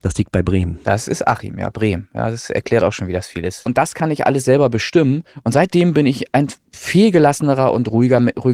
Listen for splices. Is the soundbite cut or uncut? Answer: cut